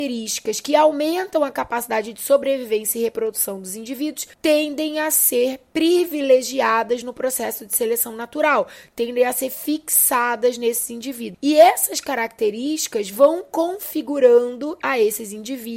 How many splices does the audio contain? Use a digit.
2